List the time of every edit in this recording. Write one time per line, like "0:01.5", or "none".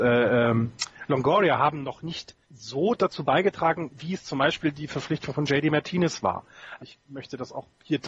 0:02.4
0:06.8